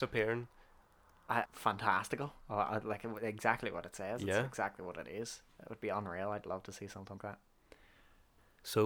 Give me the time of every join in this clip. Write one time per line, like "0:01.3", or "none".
0:01.5
0:07.2